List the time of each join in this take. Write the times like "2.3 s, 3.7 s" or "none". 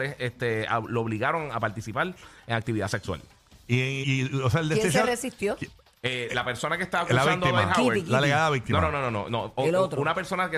4.0 s